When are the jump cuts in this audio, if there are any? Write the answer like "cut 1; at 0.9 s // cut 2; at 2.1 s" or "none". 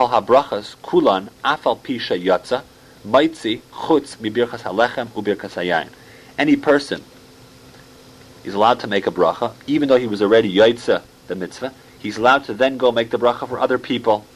none